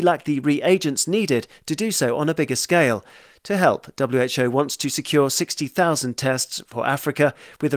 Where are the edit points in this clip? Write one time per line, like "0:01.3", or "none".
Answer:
none